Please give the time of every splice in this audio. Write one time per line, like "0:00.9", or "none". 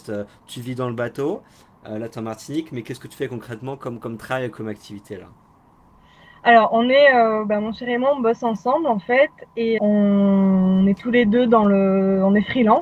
0:09.8